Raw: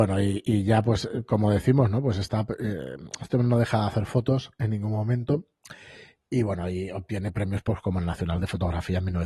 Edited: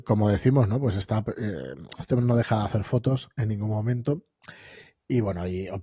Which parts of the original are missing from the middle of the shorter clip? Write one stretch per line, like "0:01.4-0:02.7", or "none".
none